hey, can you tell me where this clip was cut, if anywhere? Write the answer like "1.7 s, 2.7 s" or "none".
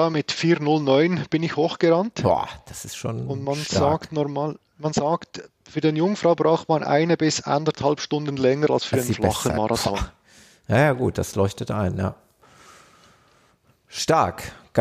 none